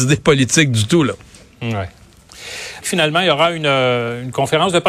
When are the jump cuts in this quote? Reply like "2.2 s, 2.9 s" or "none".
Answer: 2.8 s

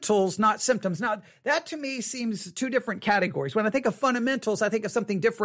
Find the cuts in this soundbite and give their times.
none

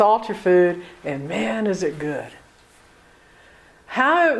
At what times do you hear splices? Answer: none

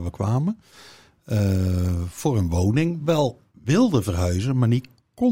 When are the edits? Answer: none

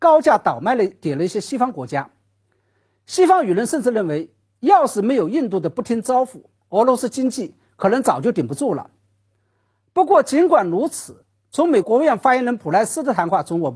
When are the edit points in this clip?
11.8 s

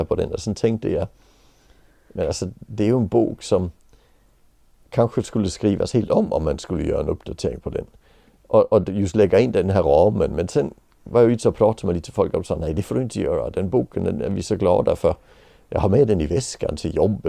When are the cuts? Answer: none

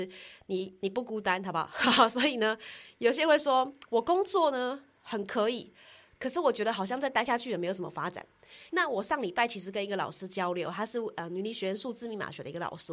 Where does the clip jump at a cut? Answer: 8.7 s

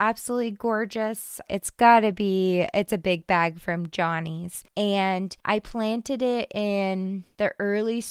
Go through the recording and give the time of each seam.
1.5 s

